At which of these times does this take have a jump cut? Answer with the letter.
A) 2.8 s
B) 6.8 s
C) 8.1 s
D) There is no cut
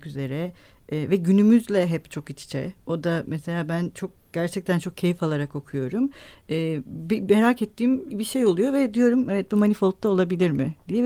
C